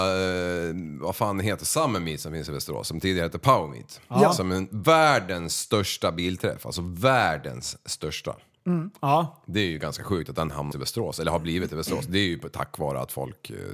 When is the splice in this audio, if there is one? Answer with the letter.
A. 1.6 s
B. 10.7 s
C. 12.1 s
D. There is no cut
B